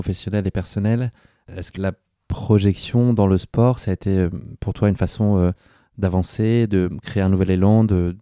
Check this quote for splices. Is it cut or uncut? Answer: cut